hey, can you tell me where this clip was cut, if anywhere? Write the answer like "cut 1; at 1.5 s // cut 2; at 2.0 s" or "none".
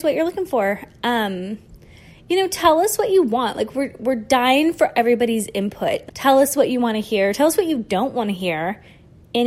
cut 1; at 6.1 s